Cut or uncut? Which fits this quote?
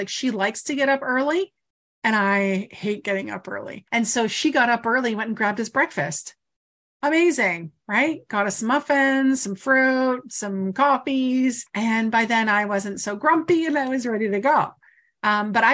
uncut